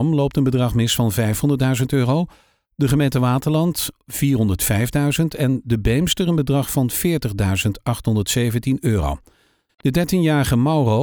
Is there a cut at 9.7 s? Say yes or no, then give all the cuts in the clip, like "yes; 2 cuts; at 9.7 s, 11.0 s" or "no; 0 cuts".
yes; 1 cut; at 9.7 s